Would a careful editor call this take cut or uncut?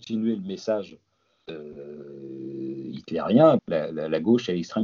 cut